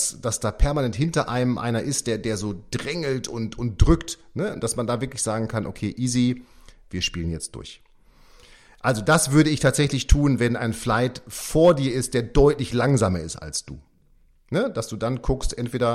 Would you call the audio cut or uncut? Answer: uncut